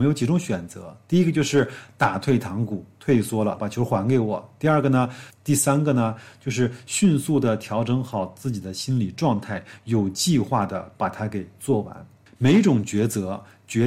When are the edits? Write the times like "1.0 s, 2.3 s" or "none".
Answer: 3.6 s, 5.3 s